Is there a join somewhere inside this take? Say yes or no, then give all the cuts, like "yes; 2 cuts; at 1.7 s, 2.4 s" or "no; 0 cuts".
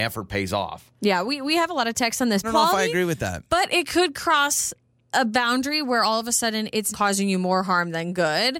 yes; 2 cuts; at 2.4 s, 6.9 s